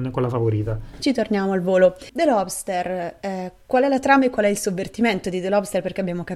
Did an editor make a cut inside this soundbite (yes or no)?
no